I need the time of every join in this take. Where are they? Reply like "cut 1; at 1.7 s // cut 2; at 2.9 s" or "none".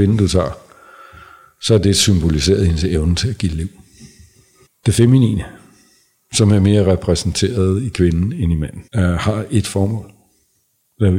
cut 1; at 4.7 s // cut 2; at 8.9 s